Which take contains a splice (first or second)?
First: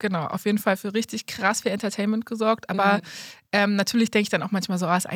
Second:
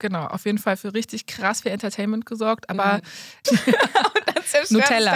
second